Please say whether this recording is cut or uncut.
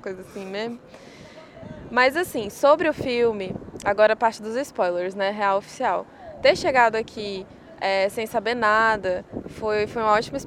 uncut